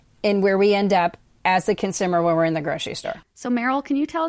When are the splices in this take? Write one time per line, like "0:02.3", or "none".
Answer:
0:03.2